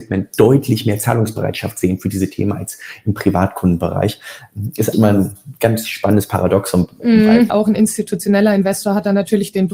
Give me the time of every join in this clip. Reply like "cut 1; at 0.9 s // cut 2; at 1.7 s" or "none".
cut 1; at 4.9 s // cut 2; at 7.5 s